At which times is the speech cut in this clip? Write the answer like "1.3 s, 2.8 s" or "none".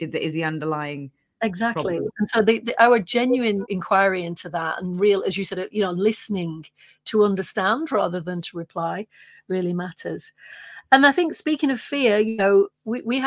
3.7 s